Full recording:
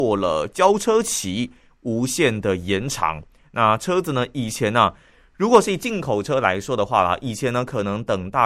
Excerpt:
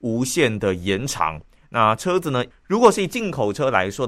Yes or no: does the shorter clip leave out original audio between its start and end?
yes